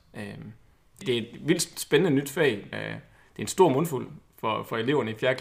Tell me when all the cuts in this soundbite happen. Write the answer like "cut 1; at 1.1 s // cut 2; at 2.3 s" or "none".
cut 1; at 1.0 s // cut 2; at 2.7 s